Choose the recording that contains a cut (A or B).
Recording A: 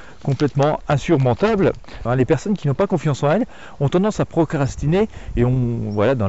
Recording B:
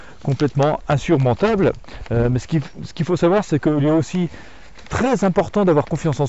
A